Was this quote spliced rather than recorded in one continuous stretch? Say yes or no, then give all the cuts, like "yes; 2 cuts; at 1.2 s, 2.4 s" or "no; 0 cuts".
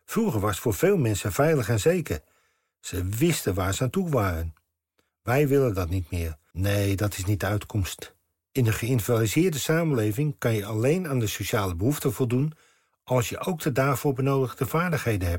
yes; 2 cuts; at 5.1 s, 6.5 s